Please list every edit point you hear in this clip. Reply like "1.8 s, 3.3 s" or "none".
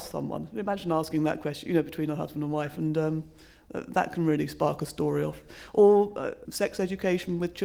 6.4 s